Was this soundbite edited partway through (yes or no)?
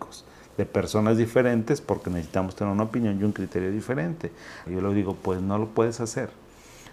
yes